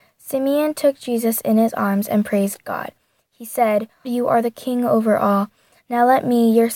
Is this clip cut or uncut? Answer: cut